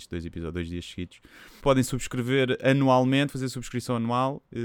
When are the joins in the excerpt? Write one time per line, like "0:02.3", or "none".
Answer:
0:01.6